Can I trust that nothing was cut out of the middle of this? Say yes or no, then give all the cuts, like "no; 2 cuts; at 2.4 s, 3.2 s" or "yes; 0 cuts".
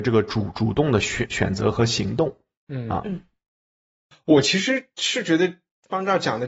yes; 0 cuts